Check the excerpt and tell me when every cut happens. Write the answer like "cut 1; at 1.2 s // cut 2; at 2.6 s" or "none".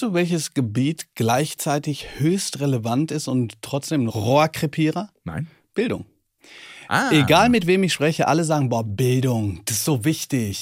none